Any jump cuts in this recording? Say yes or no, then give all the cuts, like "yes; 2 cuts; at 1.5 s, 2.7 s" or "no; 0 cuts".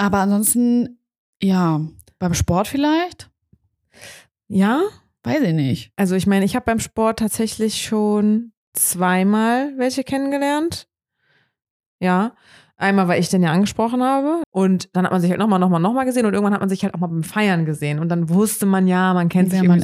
yes; 1 cut; at 14.4 s